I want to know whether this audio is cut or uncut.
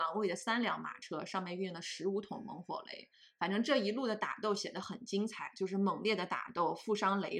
uncut